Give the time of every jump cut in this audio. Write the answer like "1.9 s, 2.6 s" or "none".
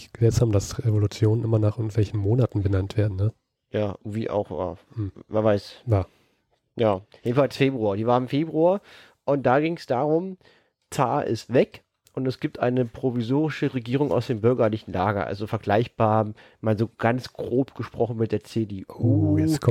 none